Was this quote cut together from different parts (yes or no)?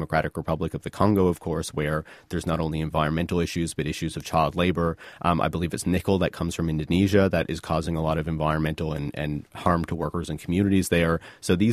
no